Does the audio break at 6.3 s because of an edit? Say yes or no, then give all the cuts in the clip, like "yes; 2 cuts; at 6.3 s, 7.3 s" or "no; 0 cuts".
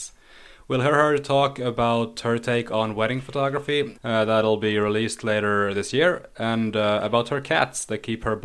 no; 1 cut; at 3.9 s